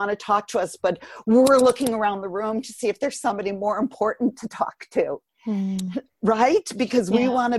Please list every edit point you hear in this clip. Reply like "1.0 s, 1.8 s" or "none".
none